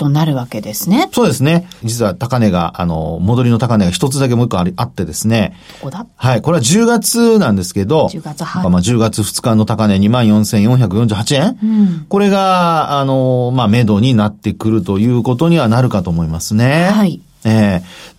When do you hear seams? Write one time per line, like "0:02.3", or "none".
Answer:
0:01.8
0:08.6